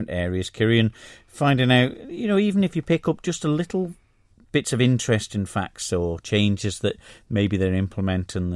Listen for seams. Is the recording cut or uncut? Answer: uncut